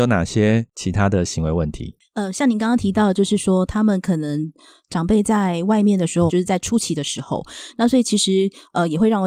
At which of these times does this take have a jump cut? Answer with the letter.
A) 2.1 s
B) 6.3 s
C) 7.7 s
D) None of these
B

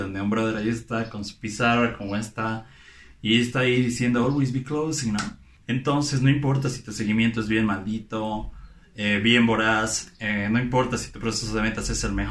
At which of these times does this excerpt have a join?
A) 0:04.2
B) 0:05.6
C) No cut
C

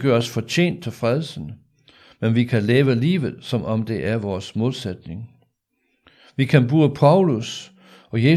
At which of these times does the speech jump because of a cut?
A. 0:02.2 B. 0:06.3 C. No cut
C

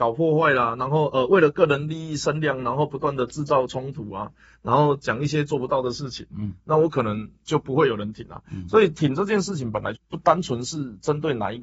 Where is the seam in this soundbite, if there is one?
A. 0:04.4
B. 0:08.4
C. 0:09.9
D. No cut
C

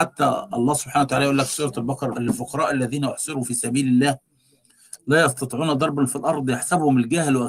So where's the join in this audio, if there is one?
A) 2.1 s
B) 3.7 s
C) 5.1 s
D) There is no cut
A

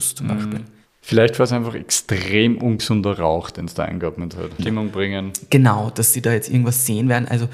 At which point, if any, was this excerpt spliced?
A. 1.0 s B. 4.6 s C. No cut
B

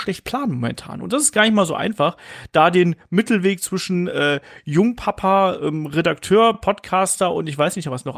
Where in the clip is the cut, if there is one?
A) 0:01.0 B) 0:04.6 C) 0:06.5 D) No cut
D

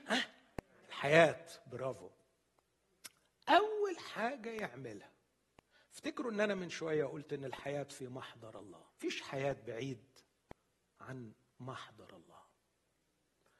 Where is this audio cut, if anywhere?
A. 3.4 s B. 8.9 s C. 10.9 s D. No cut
B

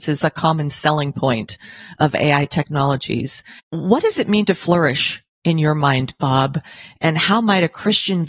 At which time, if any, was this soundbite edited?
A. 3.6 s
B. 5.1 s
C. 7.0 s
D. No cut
A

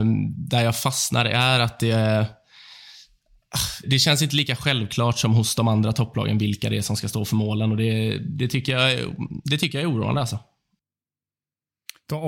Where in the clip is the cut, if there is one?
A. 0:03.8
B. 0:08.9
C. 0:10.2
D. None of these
A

